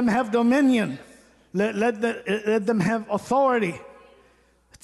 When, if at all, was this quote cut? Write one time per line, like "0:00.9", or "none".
none